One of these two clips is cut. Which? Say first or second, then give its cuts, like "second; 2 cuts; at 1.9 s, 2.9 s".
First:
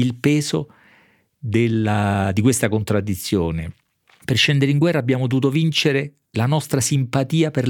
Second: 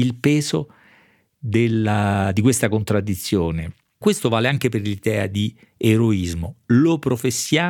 second; 1 cut; at 4.0 s